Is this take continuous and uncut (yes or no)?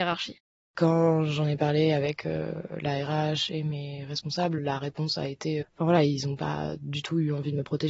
no